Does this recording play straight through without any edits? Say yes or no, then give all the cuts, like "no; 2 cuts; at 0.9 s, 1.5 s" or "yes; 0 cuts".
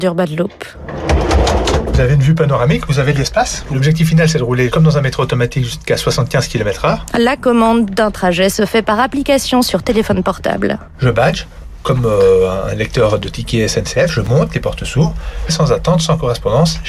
no; 1 cut; at 15.5 s